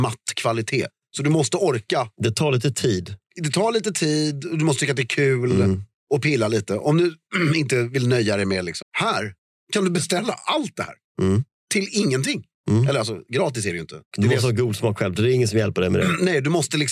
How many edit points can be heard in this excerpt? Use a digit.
2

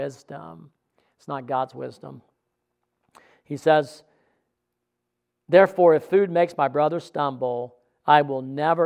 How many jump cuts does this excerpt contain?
0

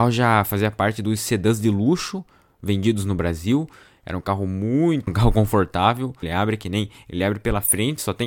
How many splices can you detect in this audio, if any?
2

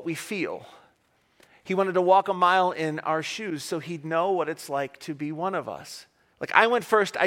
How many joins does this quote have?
1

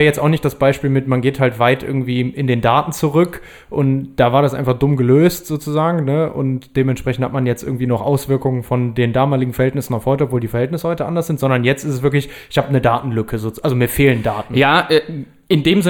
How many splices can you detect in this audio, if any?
0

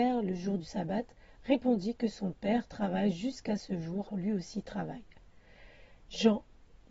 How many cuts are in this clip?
1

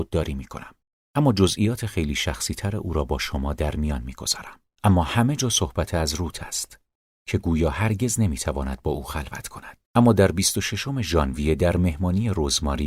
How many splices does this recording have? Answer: 2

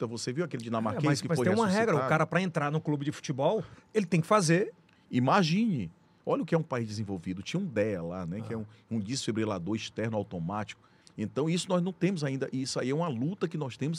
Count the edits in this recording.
2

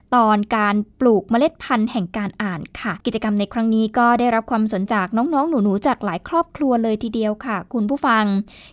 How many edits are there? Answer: 2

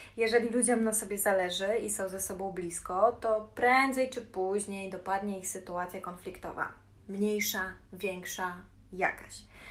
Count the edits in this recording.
1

